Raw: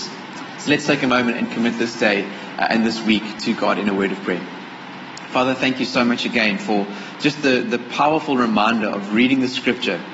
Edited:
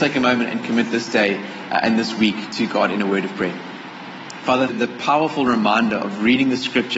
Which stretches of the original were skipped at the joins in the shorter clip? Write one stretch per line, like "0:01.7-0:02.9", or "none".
0:05.6-0:07.6